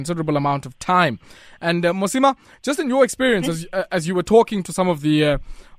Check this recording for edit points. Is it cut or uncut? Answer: uncut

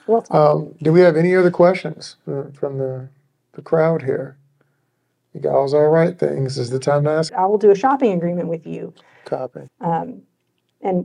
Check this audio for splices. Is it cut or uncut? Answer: cut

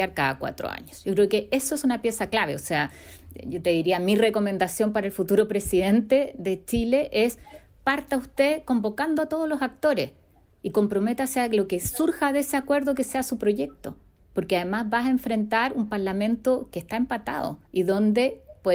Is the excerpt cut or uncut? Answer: cut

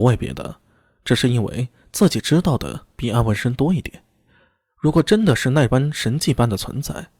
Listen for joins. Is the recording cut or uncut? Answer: uncut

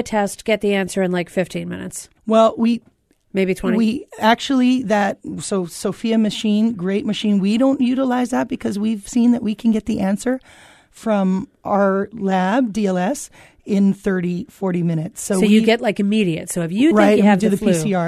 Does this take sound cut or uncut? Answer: cut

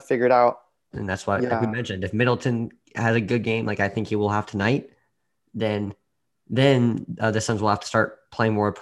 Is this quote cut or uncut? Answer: cut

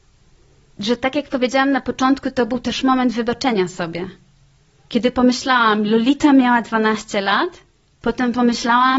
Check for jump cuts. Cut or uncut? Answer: uncut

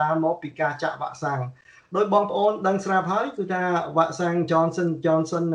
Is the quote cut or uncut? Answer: uncut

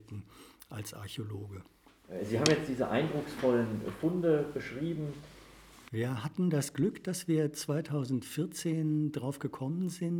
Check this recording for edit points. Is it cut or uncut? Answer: cut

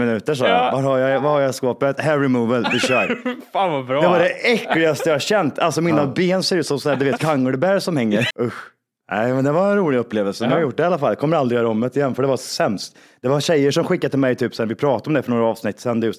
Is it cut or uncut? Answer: cut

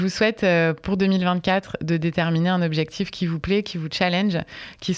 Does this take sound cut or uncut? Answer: uncut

